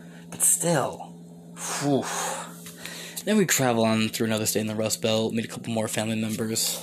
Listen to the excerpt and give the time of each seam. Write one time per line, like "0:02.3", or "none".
0:03.2